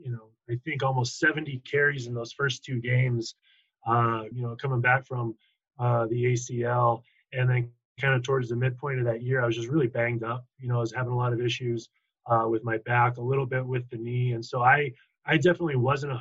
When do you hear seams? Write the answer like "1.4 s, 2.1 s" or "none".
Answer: 4.3 s

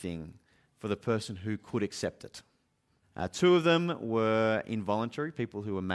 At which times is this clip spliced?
3.0 s

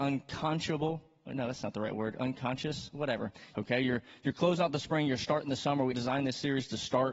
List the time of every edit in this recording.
3.5 s, 5.9 s

